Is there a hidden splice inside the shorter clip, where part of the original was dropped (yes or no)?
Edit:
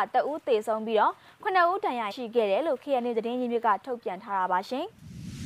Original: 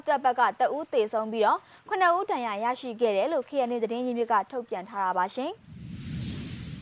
yes